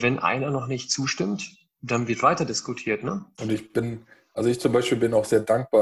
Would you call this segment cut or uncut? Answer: cut